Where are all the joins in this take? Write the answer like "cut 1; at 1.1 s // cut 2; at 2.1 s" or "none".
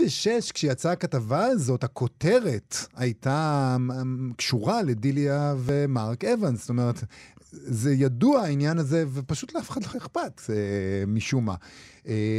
none